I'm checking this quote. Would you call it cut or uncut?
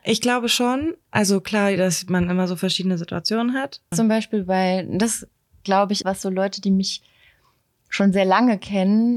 cut